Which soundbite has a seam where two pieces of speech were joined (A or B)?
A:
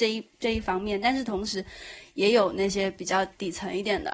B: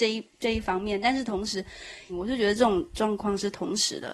B